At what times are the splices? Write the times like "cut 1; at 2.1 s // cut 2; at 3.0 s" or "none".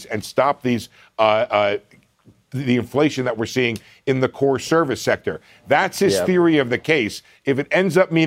none